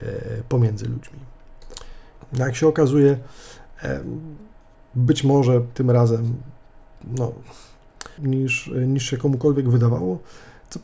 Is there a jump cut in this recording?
yes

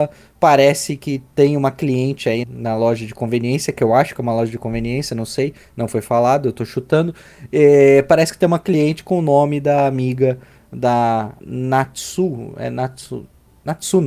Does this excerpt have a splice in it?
yes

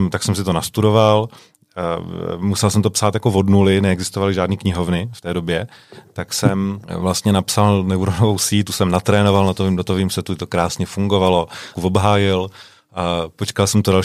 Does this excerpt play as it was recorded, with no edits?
no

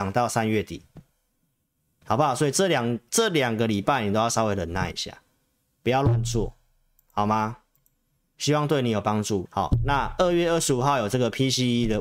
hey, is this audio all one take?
no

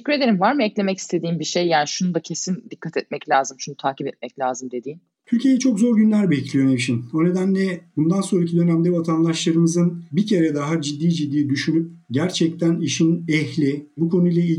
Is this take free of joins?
no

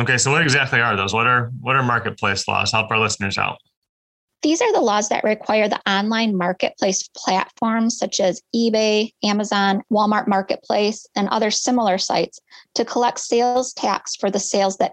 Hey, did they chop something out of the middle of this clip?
yes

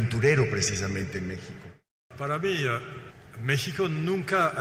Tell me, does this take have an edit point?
no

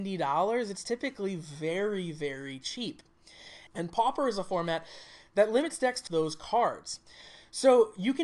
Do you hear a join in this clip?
yes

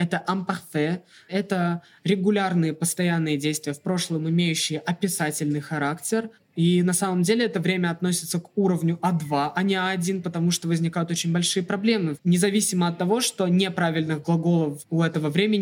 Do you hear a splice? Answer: yes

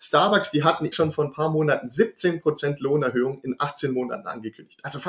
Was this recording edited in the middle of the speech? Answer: yes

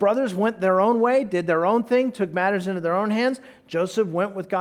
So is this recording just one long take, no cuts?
yes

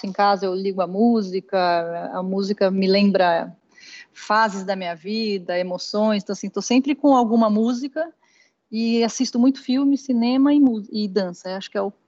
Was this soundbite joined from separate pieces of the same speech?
no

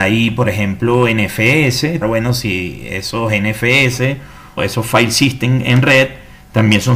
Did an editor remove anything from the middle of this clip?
yes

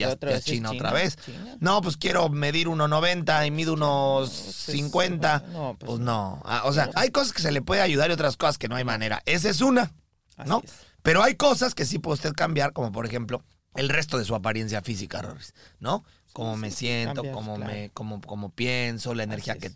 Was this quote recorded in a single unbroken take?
no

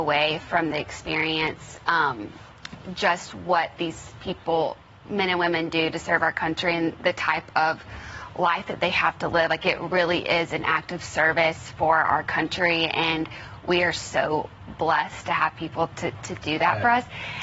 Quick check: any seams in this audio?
no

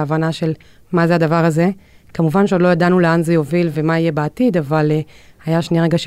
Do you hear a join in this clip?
no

